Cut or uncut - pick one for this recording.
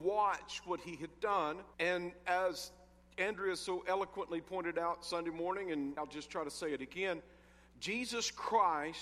cut